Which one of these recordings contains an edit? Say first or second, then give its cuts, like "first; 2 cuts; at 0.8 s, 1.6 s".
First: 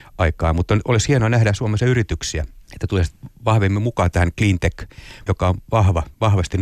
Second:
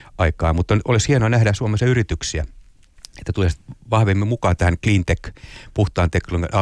first; 2 cuts; at 2.6 s, 5.3 s